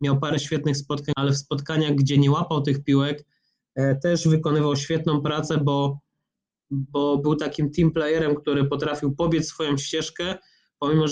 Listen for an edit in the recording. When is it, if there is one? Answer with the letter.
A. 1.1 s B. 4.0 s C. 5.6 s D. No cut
A